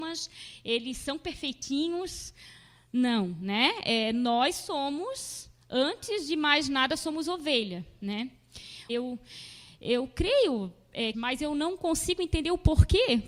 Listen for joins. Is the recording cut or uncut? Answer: cut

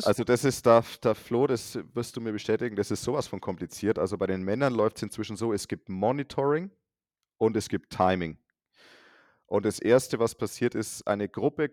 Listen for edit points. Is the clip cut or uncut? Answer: uncut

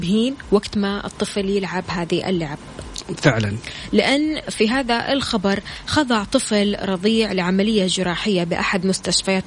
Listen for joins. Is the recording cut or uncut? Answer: uncut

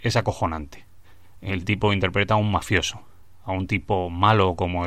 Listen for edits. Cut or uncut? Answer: uncut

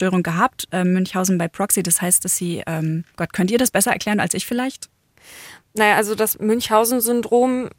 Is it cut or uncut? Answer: cut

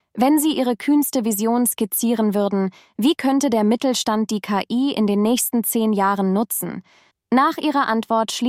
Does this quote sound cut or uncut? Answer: cut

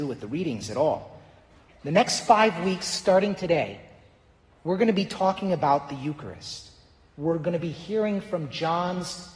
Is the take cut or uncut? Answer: cut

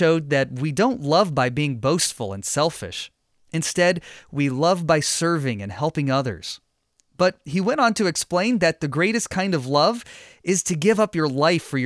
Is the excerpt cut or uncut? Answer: uncut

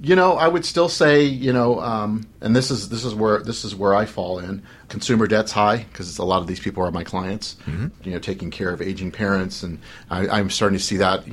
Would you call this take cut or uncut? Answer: cut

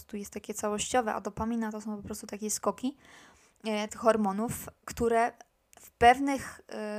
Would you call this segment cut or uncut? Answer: cut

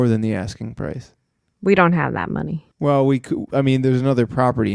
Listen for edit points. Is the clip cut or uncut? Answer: cut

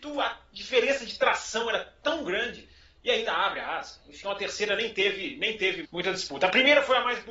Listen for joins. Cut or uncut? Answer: cut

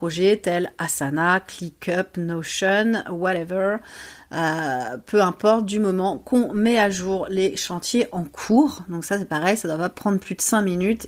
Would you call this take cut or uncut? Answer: uncut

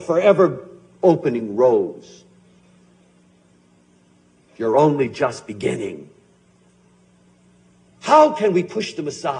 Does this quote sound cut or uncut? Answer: cut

